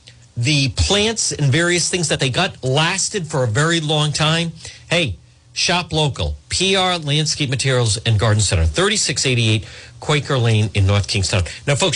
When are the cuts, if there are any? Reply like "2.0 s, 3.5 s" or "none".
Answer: none